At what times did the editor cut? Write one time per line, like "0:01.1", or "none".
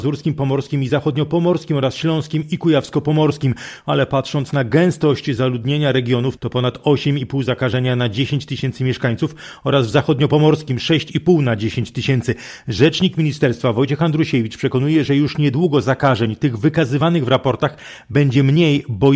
0:06.4